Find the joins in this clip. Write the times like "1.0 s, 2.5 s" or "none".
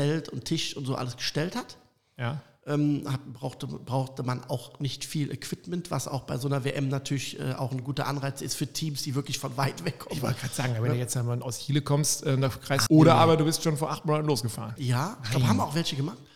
12.9 s, 14.8 s